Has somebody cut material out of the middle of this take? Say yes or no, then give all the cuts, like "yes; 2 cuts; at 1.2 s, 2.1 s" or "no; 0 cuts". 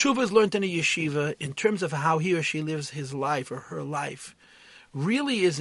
no; 0 cuts